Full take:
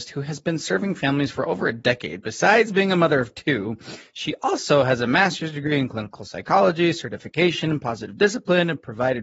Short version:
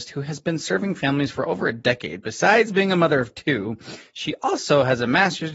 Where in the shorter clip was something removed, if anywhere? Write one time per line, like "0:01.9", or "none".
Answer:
none